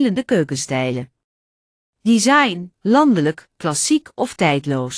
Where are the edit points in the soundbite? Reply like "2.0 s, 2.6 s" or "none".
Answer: 2.7 s